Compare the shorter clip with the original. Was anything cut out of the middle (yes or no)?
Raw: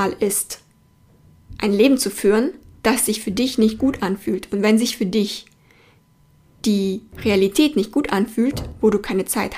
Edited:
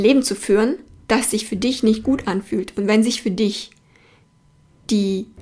no